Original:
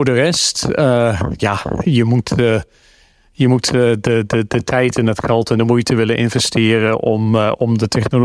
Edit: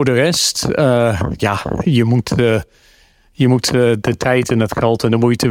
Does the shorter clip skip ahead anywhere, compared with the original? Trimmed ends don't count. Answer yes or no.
yes